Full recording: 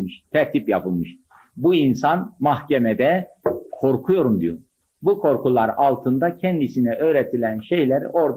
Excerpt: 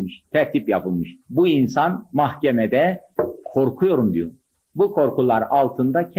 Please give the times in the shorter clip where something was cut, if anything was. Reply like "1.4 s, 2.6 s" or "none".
1.2 s